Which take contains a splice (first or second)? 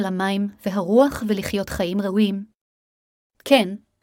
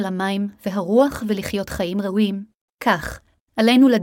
second